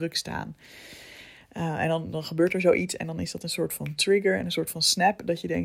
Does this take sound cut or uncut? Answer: uncut